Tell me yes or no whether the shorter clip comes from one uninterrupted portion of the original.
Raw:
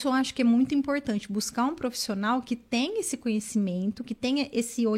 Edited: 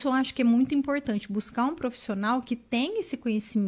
yes